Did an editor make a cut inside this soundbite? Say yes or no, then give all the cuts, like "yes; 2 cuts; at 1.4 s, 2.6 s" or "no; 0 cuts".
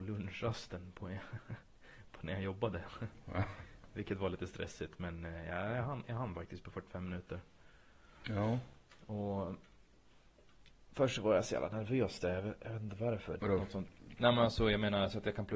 yes; 1 cut; at 13.4 s